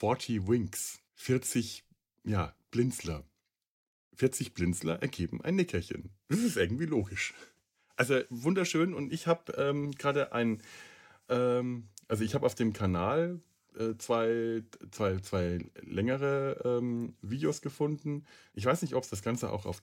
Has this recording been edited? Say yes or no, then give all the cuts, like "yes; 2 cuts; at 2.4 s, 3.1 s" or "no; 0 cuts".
yes; 2 cuts; at 1.1 s, 18.5 s